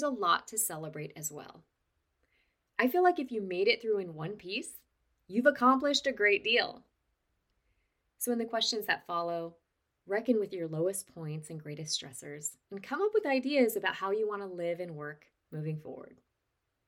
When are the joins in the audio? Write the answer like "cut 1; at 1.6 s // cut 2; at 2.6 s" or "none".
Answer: cut 1; at 9.9 s // cut 2; at 12.6 s